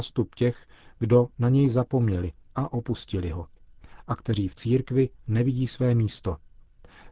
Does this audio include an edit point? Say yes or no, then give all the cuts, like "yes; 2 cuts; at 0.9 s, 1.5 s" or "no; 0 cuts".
yes; 1 cut; at 1.3 s